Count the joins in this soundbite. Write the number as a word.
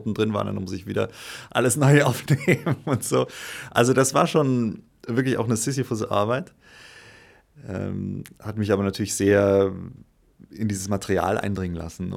zero